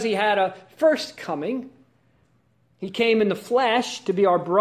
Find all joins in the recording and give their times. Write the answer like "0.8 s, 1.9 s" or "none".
none